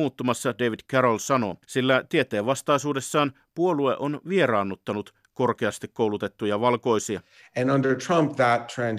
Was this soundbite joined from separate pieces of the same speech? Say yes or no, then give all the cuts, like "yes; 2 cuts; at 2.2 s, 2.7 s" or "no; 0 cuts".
yes; 1 cut; at 1.6 s